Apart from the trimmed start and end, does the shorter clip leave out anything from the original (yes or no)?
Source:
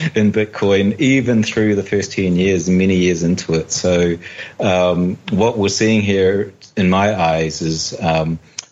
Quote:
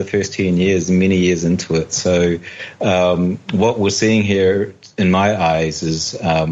no